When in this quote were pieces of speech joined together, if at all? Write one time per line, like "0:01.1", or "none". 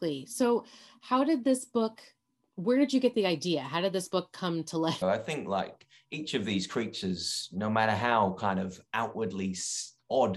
0:05.0